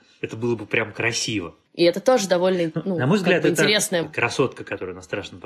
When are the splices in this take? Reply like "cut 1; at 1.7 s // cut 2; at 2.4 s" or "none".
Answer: cut 1; at 1.7 s // cut 2; at 4.0 s